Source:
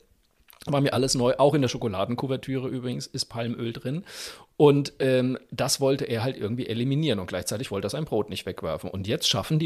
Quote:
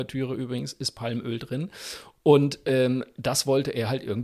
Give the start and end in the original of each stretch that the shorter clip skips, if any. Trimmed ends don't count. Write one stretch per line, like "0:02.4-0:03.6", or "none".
none